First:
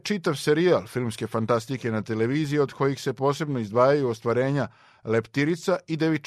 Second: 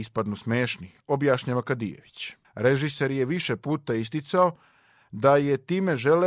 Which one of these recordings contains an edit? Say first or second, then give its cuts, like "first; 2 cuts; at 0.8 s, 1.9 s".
second; 1 cut; at 2.4 s